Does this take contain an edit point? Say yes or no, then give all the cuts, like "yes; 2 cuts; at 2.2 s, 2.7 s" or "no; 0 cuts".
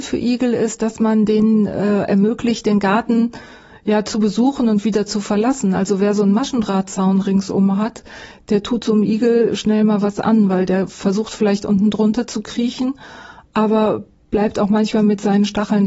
no; 0 cuts